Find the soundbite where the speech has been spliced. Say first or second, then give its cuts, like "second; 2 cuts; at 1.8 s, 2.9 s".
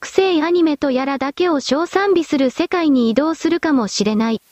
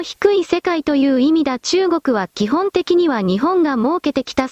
first; 1 cut; at 1.9 s